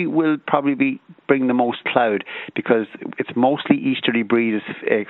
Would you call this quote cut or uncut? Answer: uncut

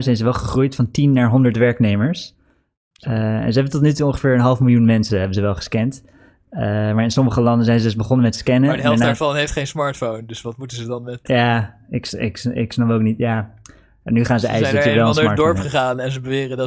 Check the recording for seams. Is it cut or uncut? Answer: uncut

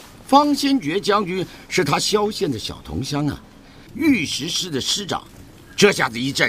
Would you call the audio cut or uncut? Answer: cut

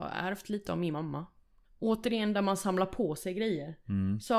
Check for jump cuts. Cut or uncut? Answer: cut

